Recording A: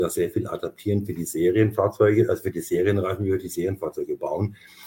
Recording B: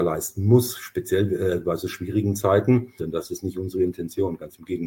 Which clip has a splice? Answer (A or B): B